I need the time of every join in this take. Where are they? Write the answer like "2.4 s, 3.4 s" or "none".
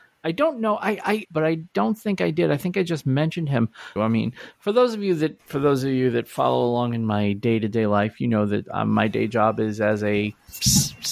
1.2 s, 4.0 s